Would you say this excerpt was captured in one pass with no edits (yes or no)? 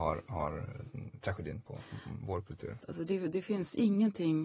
no